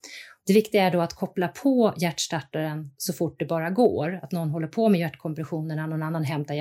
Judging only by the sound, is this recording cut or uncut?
uncut